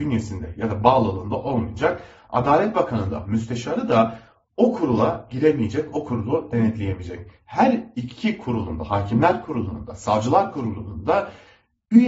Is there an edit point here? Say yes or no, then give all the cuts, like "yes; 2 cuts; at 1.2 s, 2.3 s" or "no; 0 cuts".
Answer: no; 0 cuts